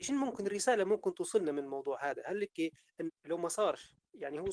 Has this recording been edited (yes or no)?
yes